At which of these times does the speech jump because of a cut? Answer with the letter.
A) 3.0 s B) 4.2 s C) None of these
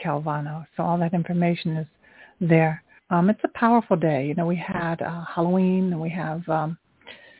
A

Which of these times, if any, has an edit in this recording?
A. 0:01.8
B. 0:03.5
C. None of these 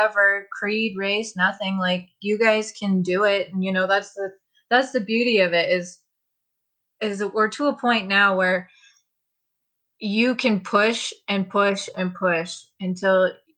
C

